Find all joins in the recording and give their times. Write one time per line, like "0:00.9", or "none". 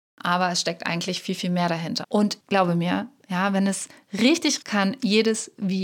0:02.0
0:03.2
0:04.6